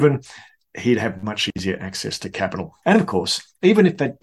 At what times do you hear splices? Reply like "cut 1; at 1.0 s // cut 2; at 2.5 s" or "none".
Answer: cut 1; at 2.8 s